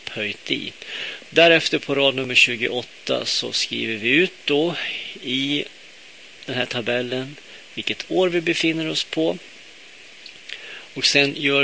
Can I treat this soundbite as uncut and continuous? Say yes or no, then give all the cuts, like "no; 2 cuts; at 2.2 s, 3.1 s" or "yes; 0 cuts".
no; 1 cut; at 1.2 s